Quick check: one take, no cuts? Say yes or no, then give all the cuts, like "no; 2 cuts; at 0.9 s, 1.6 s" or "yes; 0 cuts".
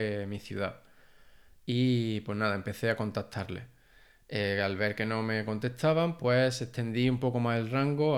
yes; 0 cuts